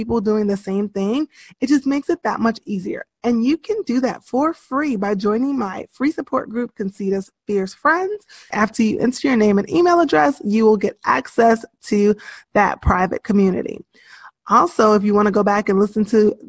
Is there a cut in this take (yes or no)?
yes